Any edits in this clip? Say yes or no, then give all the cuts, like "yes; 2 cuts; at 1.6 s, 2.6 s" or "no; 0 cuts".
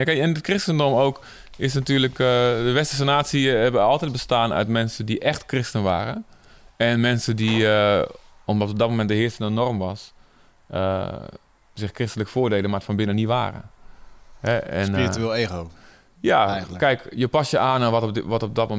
no; 0 cuts